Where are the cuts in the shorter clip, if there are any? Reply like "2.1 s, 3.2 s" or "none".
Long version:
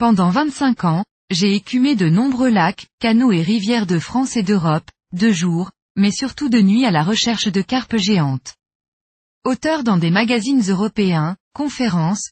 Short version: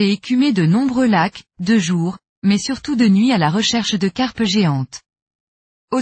1.5 s